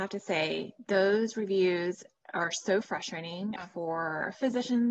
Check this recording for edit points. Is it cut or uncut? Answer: cut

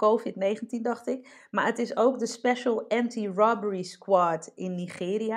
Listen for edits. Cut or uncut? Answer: uncut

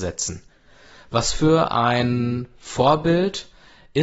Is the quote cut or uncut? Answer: uncut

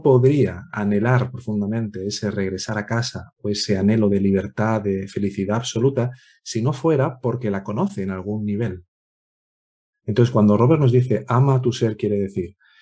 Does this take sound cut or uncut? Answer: cut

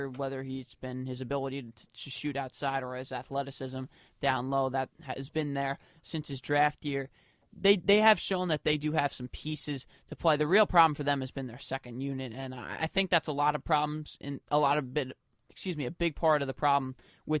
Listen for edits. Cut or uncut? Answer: uncut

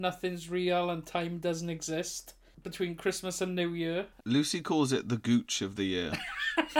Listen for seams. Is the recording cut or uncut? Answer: uncut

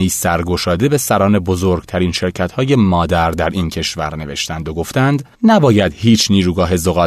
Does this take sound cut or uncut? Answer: cut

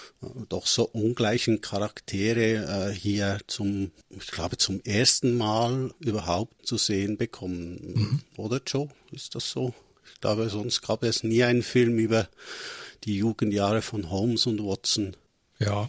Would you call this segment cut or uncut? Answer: cut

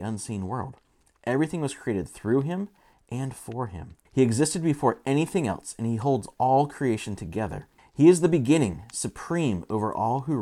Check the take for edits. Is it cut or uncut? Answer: cut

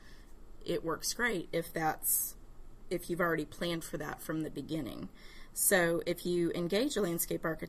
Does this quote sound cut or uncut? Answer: uncut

